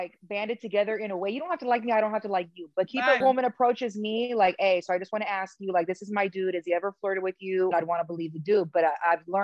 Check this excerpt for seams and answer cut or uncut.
cut